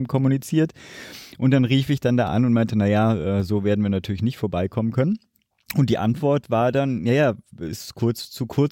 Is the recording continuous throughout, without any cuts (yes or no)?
yes